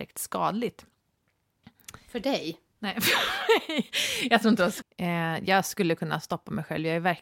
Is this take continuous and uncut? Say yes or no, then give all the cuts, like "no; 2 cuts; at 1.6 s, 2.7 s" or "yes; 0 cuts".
no; 1 cut; at 4.8 s